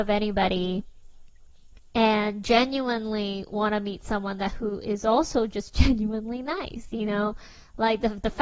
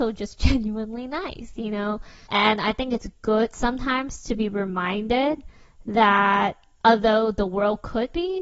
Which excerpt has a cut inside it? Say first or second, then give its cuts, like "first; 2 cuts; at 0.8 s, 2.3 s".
second; 1 cut; at 2.3 s